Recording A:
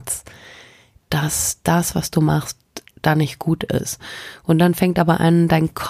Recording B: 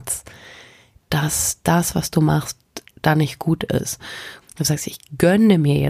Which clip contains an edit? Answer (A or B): B